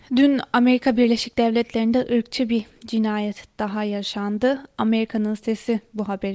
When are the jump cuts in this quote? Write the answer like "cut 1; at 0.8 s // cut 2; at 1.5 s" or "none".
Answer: none